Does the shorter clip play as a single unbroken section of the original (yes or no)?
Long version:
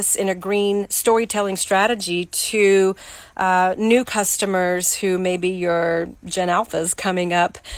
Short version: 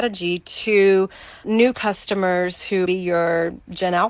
no